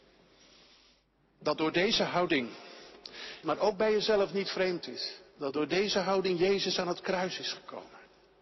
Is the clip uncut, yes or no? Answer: no